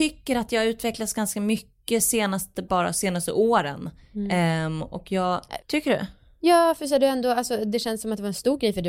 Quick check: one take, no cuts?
no; 1 cut; at 5.6 s

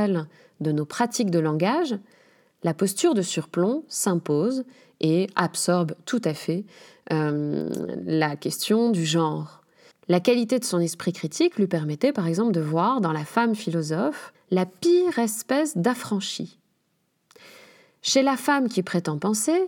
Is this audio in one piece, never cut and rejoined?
no; 2 cuts; at 9.9 s, 14.3 s

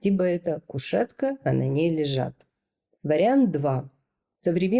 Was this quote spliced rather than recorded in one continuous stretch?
no; 0 cuts

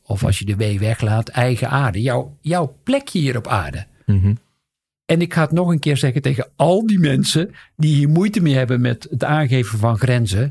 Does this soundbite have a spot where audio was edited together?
no; 0 cuts

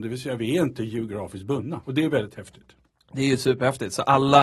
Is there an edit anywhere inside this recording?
yes; 1 cut; at 1.8 s

